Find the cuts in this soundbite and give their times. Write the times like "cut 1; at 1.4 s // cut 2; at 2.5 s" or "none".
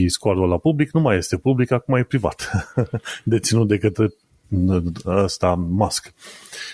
none